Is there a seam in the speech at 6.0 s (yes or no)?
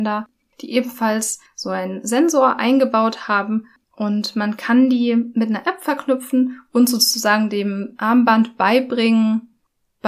no